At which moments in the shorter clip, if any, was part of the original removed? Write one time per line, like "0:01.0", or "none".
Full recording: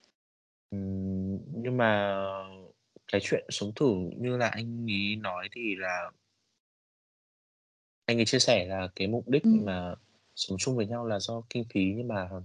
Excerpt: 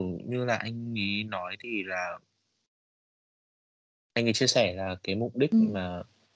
none